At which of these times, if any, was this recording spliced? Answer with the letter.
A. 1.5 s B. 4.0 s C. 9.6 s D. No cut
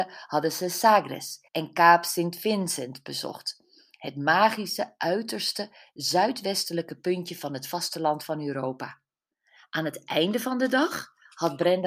A